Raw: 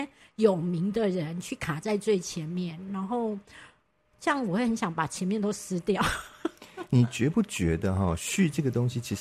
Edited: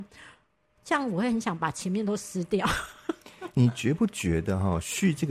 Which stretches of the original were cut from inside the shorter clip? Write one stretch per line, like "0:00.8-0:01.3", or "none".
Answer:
none